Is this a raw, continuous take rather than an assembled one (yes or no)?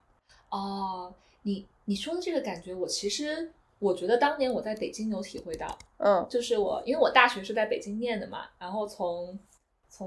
yes